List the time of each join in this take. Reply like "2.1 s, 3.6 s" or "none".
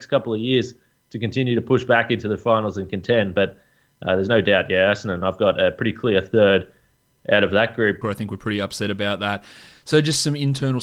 8.0 s